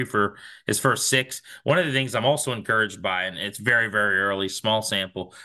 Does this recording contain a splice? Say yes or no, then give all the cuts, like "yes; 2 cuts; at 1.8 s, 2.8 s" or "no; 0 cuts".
no; 0 cuts